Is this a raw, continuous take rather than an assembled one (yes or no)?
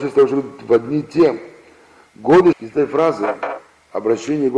no